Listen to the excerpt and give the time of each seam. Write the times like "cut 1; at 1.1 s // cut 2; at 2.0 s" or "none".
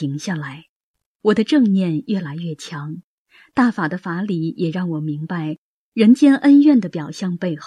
cut 1; at 1.2 s